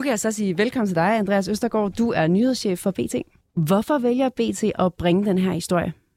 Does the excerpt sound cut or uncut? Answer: cut